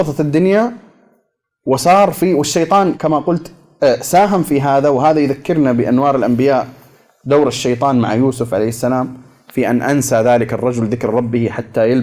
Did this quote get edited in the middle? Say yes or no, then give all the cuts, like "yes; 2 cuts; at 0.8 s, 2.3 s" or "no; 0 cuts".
yes; 1 cut; at 2.9 s